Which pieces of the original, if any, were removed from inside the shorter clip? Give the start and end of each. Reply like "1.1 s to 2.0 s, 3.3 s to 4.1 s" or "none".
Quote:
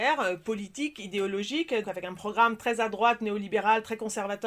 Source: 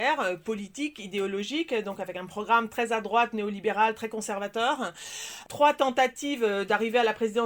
1.8 s to 2.0 s